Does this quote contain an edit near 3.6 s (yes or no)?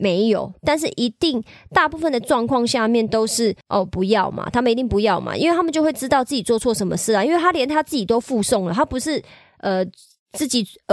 yes